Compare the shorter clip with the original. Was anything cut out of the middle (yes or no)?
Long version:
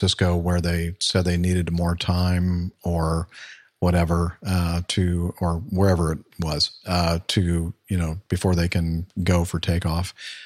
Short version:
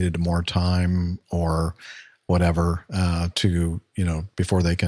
yes